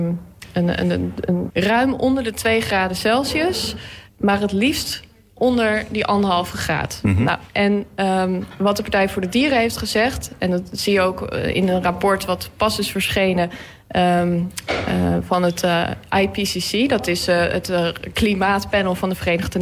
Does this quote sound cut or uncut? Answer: cut